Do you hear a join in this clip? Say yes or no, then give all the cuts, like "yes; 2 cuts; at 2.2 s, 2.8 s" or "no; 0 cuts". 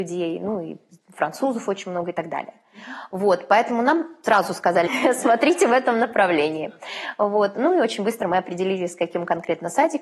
yes; 1 cut; at 4.9 s